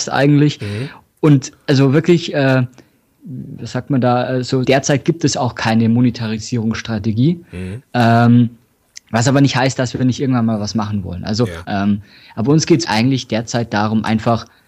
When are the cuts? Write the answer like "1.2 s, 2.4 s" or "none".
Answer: 4.6 s, 11.6 s, 12.8 s